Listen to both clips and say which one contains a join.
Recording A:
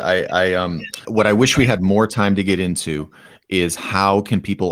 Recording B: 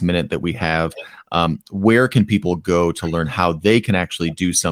A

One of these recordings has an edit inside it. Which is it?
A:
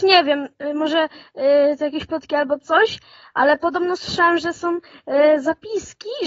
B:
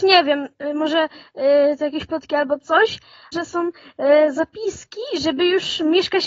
B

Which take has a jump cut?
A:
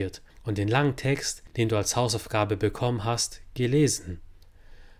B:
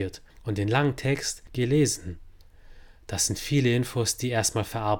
B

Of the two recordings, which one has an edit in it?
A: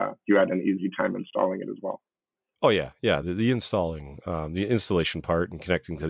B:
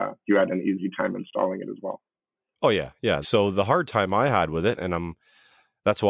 B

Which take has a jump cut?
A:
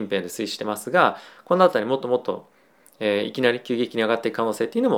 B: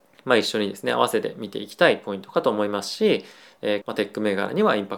B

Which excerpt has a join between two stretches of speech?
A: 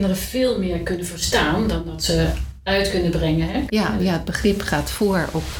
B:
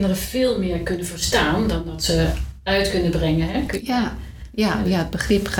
A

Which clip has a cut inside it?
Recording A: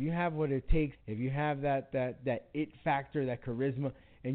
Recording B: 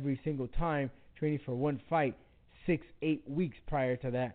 A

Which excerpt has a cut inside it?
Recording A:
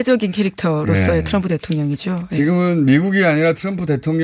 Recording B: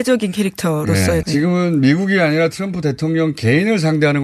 B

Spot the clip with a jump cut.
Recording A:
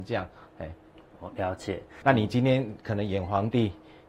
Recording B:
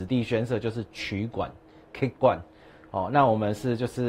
A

